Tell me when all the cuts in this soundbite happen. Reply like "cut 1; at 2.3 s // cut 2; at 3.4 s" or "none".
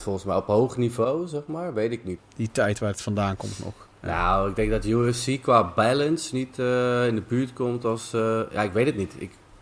cut 1; at 2.2 s

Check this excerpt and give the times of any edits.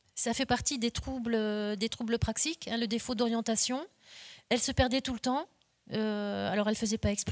none

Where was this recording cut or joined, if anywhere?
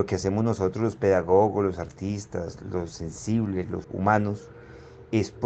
cut 1; at 3.8 s

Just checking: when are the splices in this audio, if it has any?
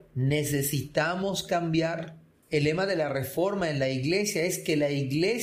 cut 1; at 2.4 s

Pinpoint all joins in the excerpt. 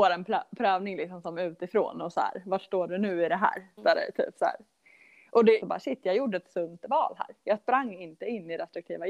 cut 1; at 3.8 s // cut 2; at 5.6 s

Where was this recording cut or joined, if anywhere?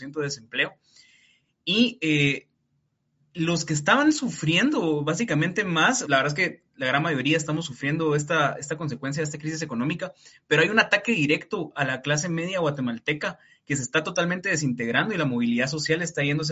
cut 1; at 6.1 s

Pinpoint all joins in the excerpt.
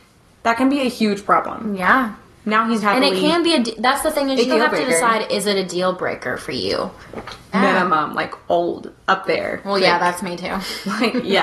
cut 1; at 2.8 s // cut 2; at 4.5 s // cut 3; at 7.5 s

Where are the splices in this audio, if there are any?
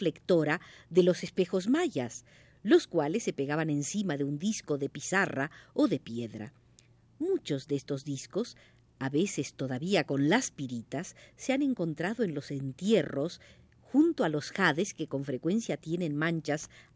none

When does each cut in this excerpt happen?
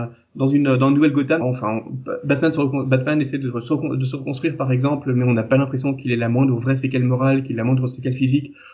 cut 1; at 1.4 s

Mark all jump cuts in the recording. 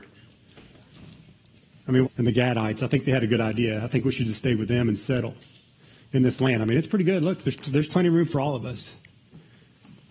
cut 1; at 2.0 s

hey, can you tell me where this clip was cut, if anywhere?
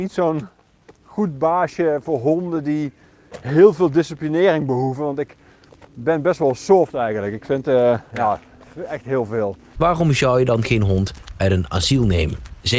cut 1; at 8.1 s // cut 2; at 9.8 s

